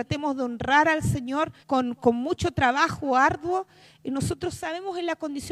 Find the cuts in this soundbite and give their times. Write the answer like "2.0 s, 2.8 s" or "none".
1.6 s